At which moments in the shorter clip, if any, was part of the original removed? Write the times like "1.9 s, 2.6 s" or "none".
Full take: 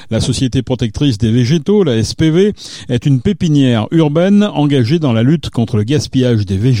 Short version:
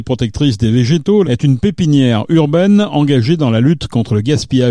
1.2 s